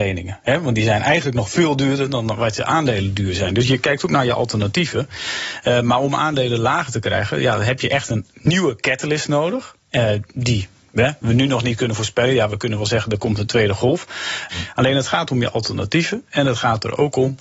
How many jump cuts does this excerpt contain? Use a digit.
1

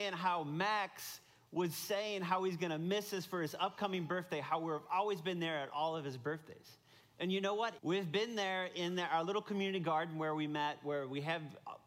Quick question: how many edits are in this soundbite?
1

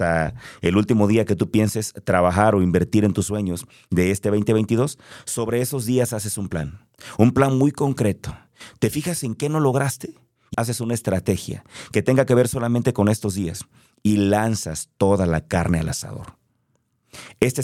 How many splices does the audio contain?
1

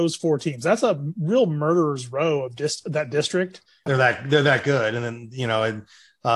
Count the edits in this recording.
1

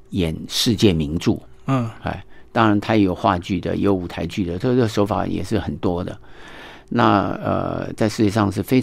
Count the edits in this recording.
0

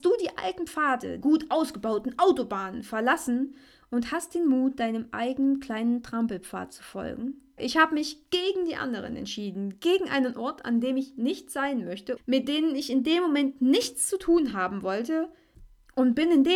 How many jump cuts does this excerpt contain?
3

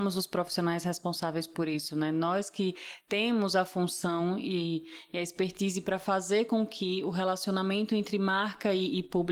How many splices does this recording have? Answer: 0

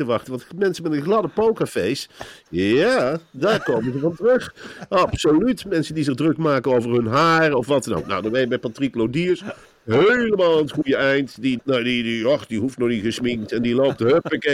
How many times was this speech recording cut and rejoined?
1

